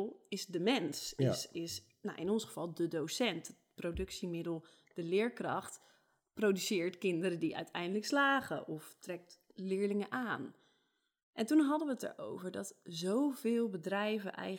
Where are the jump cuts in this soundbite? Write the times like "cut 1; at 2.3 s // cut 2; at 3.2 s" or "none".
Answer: none